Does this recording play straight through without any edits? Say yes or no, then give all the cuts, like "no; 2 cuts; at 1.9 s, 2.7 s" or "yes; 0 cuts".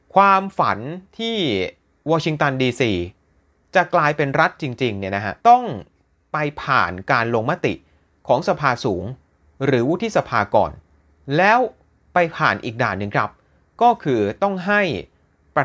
no; 1 cut; at 5.4 s